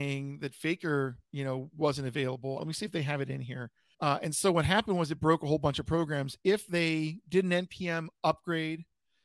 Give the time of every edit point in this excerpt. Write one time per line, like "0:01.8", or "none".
0:02.6
0:03.9

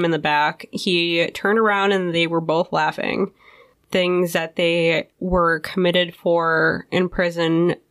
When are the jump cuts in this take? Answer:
0:03.7

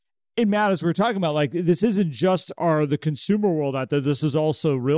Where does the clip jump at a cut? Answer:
none

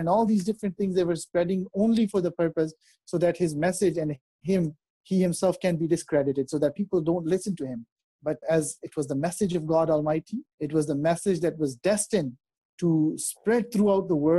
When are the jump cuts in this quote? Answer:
0:08.4
0:10.5

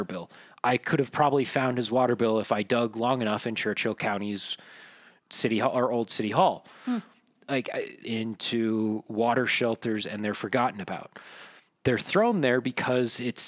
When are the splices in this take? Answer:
0:08.0

